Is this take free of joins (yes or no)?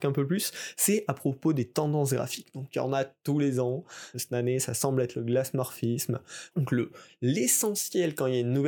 no